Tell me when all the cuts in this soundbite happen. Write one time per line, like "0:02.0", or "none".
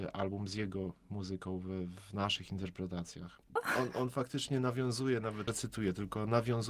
0:03.6
0:05.5